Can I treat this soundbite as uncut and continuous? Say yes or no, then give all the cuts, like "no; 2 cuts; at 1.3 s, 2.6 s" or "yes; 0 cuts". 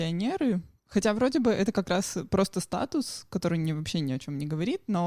yes; 0 cuts